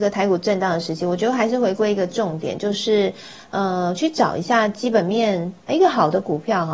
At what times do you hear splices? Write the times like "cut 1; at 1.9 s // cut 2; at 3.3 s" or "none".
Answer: cut 1; at 5.7 s